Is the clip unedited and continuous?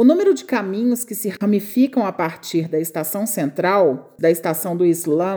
no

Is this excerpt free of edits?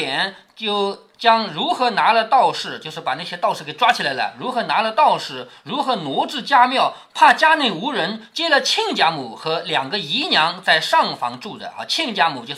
yes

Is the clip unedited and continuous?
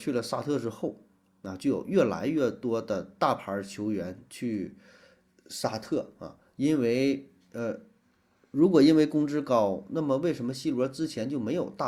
yes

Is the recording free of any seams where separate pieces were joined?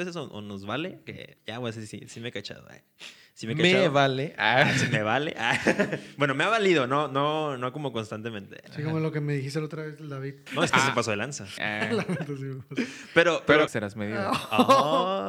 no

